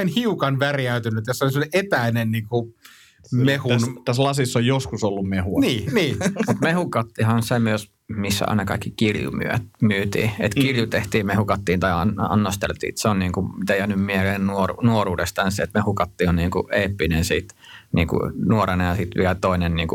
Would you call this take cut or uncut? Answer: uncut